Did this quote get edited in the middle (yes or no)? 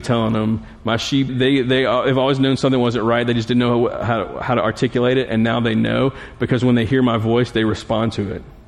yes